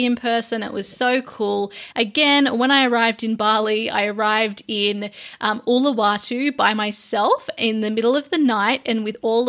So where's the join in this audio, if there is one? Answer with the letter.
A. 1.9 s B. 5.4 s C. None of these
A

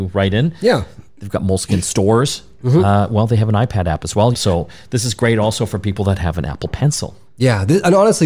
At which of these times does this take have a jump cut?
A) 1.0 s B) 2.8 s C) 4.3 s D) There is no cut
C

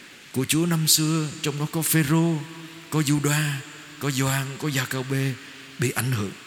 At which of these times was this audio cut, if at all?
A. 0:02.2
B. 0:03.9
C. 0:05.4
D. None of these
D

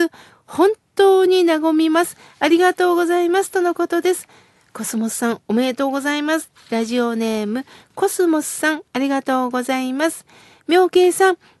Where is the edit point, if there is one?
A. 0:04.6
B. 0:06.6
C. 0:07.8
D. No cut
B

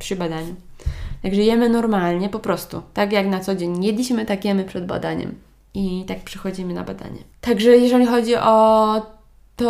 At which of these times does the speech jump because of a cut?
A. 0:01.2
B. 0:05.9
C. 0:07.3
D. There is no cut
C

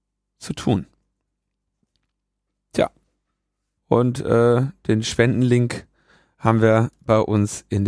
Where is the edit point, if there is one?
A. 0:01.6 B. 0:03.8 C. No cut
B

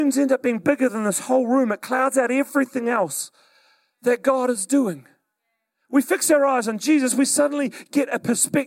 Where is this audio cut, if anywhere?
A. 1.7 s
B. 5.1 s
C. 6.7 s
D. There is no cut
D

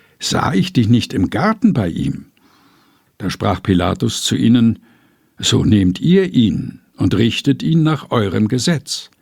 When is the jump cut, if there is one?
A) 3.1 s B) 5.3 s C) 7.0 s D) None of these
A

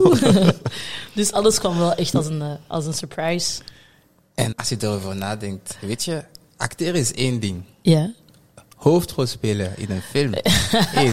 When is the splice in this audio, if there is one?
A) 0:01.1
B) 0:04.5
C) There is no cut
B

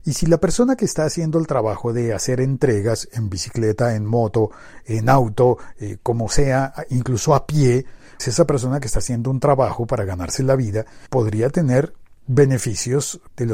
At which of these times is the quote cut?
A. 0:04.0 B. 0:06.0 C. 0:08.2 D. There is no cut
C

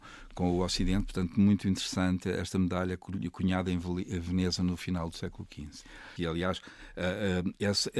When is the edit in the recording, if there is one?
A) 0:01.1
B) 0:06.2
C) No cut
B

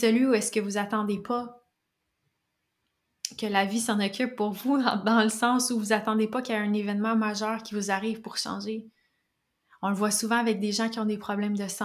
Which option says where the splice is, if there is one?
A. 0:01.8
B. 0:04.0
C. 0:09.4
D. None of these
D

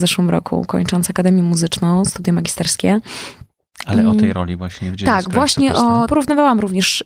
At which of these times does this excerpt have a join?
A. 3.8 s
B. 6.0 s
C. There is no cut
B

